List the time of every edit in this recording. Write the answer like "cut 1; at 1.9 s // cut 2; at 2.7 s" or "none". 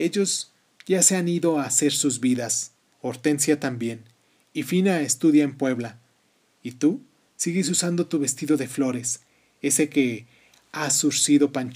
cut 1; at 2.9 s